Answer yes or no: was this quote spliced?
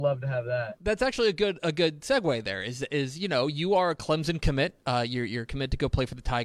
no